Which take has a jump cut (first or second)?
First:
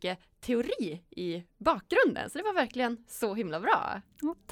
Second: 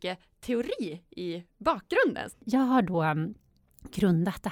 second